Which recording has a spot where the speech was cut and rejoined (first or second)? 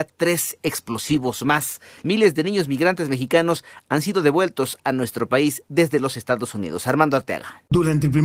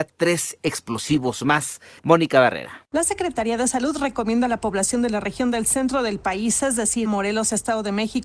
second